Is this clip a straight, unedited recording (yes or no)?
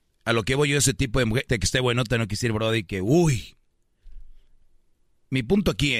no